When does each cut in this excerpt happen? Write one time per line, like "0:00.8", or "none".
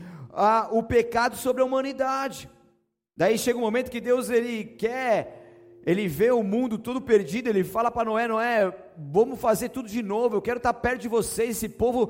0:03.1